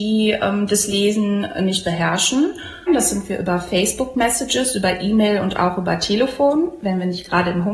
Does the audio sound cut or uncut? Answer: cut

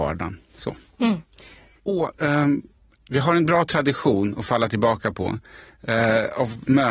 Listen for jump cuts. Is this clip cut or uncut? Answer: cut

